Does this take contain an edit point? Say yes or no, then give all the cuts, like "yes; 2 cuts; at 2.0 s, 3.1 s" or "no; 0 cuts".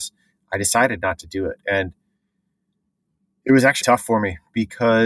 yes; 1 cut; at 3.8 s